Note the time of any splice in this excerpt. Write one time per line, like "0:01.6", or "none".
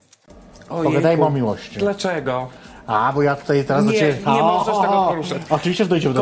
none